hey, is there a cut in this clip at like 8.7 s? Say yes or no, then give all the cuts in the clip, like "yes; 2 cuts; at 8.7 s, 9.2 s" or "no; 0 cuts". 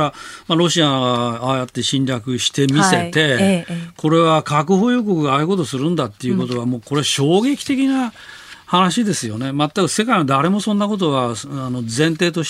no; 0 cuts